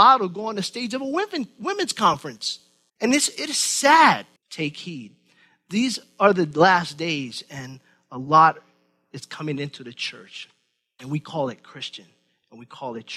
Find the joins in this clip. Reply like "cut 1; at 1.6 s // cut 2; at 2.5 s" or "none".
cut 1; at 2.9 s // cut 2; at 4.4 s